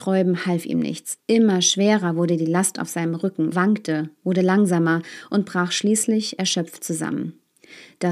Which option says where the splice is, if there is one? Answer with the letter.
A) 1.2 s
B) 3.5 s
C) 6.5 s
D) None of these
B